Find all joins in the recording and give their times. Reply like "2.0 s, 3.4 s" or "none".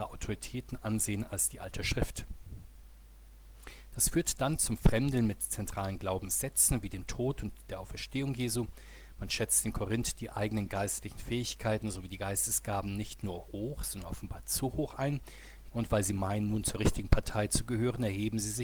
15.7 s